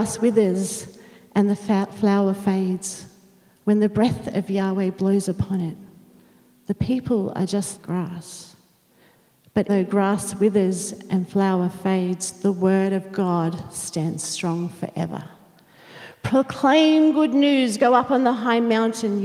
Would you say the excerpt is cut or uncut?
cut